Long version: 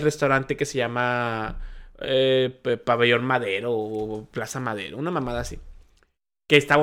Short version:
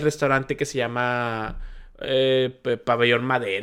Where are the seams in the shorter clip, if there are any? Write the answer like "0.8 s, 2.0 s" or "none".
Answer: none